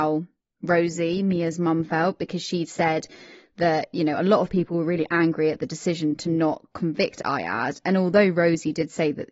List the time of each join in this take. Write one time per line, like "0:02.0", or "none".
none